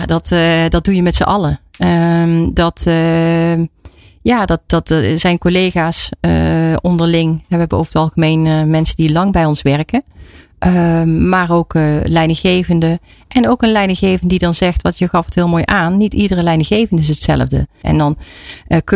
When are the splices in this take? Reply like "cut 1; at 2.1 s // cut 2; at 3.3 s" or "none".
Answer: cut 1; at 17.8 s